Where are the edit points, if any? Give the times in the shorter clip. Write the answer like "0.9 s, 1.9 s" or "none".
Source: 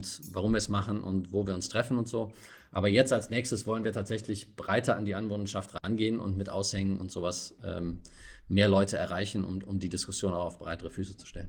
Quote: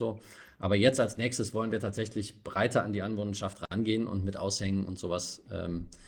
none